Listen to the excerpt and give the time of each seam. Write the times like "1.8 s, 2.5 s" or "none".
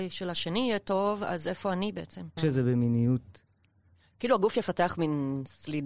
2.4 s